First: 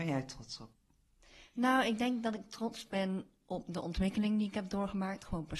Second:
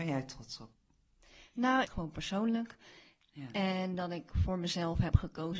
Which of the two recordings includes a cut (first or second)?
second